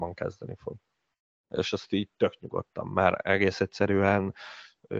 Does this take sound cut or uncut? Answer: uncut